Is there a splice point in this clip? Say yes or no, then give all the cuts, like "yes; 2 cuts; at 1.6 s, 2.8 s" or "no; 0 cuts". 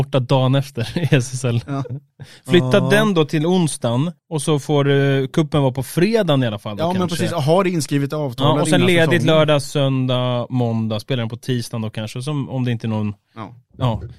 yes; 1 cut; at 4.2 s